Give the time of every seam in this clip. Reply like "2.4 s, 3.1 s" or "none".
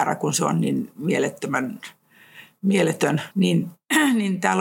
3.3 s

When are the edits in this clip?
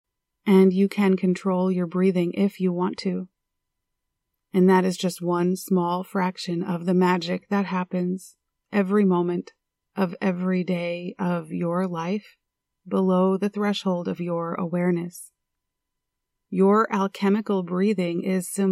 4.3 s, 16.5 s

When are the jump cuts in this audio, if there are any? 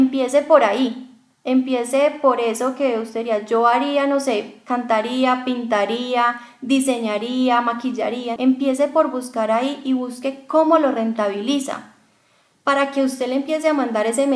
8.4 s

